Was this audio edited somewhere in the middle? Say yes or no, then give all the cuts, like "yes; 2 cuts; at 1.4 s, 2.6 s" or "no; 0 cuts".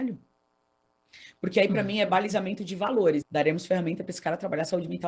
yes; 1 cut; at 3.2 s